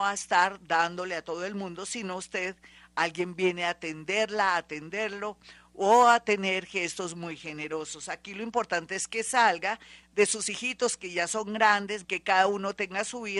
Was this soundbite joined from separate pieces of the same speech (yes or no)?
yes